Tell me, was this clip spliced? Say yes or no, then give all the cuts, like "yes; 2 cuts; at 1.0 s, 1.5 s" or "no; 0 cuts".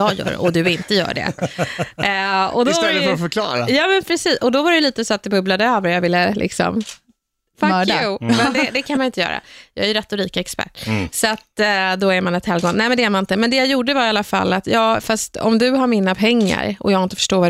no; 0 cuts